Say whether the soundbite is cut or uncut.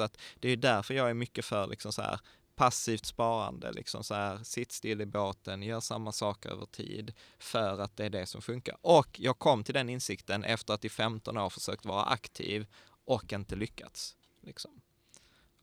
uncut